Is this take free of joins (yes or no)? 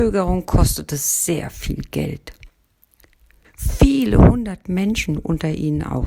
no